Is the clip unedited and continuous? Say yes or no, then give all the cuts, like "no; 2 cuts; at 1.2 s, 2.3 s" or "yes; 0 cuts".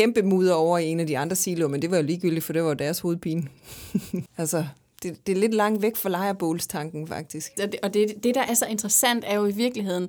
no; 2 cuts; at 4.3 s, 7.6 s